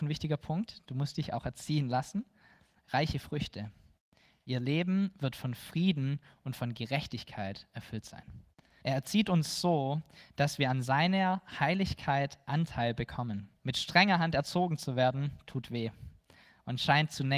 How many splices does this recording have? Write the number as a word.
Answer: two